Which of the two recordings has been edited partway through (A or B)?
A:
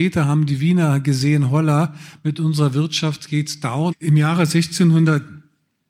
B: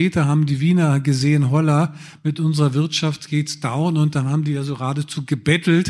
A